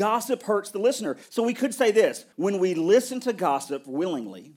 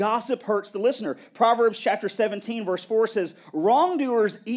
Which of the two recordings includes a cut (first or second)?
first